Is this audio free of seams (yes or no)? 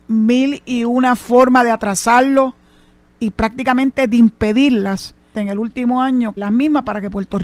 no